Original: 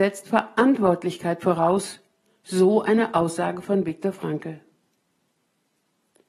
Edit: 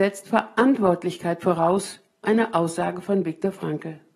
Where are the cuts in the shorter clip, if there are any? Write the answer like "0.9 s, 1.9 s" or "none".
2.2 s